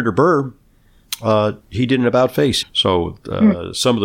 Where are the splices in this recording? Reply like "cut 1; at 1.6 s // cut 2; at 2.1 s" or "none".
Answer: cut 1; at 1.6 s // cut 2; at 2.6 s